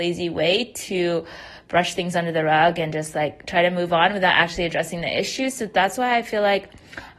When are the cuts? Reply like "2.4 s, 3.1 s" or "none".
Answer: none